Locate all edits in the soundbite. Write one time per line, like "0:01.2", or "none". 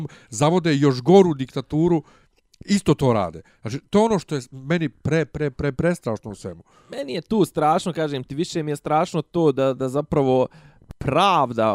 none